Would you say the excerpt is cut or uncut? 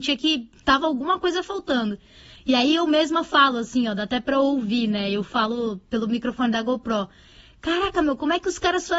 uncut